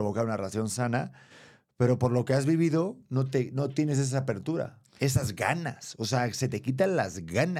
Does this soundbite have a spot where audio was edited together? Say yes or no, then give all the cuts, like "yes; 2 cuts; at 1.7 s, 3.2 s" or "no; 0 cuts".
no; 0 cuts